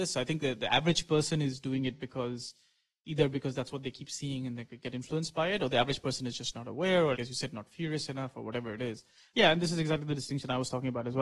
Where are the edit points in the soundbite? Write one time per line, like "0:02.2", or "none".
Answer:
0:07.1
0:09.3